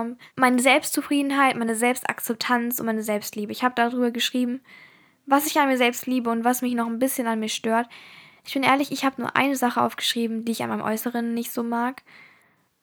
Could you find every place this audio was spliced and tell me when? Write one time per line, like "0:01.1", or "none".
none